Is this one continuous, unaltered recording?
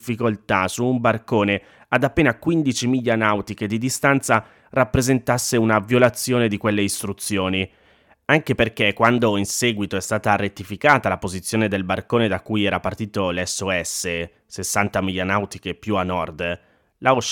yes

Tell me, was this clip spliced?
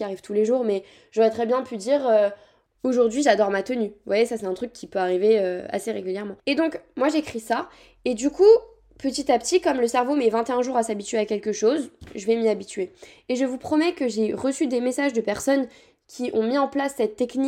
no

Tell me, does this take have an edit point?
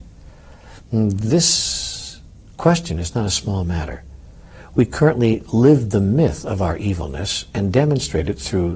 no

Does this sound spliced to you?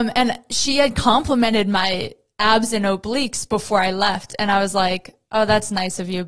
no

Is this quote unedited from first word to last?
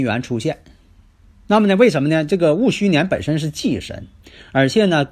yes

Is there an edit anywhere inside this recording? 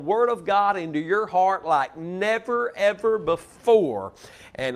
no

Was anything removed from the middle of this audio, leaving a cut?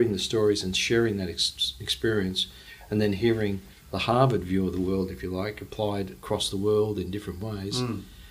no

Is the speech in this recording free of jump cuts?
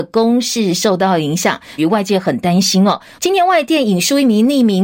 no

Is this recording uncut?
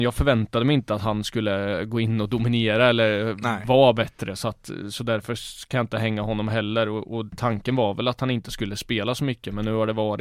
yes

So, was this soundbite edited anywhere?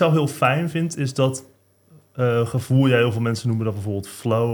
no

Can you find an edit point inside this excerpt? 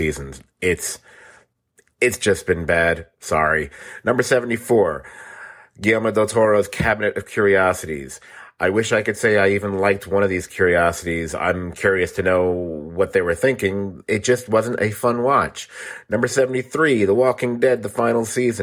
no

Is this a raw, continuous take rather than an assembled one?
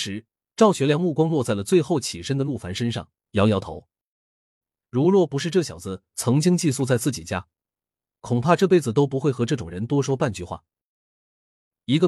yes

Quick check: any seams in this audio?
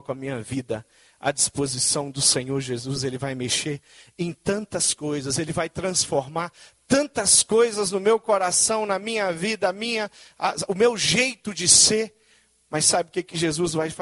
no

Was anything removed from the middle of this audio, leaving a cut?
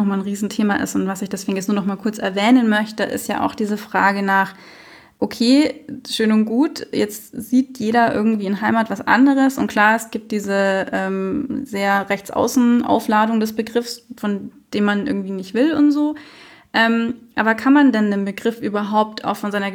no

